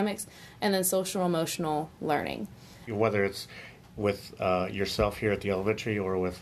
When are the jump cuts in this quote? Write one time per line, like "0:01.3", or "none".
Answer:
0:02.9